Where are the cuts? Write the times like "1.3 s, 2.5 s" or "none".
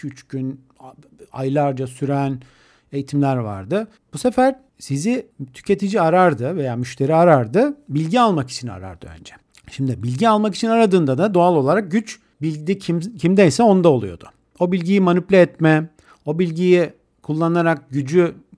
none